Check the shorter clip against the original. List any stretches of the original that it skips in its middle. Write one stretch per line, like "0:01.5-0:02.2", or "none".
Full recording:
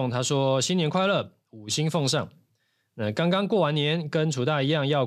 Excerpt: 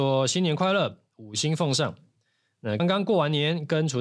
0:03.1-0:03.2